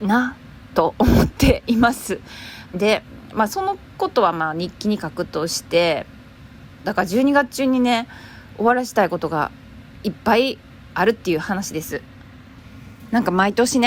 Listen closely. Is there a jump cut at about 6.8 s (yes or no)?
yes